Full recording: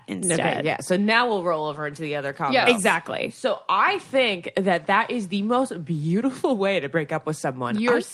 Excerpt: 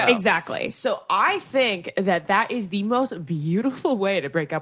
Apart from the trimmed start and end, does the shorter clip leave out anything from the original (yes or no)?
no